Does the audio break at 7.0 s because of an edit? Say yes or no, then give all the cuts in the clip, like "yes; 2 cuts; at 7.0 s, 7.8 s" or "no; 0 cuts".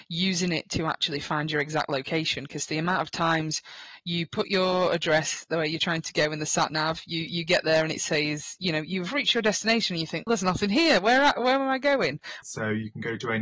no; 2 cuts; at 10.3 s, 12.4 s